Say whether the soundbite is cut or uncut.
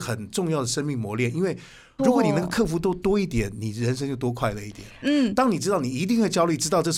cut